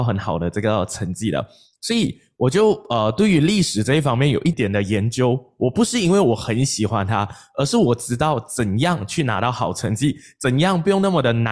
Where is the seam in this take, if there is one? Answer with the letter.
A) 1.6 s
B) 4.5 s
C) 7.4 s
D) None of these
B